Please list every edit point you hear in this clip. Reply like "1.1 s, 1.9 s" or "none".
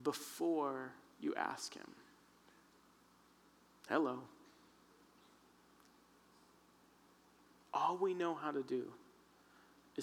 none